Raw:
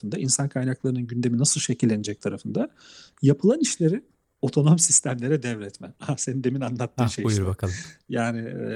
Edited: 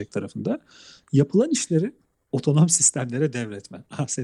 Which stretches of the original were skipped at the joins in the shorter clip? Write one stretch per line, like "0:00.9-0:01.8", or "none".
none